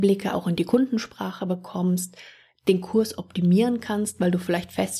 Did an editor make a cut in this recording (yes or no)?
no